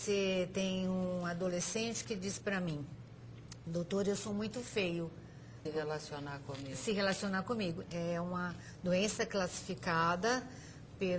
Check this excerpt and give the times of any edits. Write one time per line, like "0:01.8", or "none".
0:05.7
0:07.8